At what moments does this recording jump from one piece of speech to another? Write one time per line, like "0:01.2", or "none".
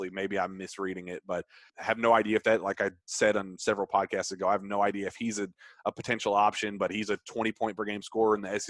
0:01.7